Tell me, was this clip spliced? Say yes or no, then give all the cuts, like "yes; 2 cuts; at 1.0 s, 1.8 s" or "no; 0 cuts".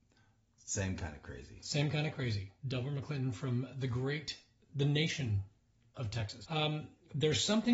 yes; 2 cuts; at 2.6 s, 6.4 s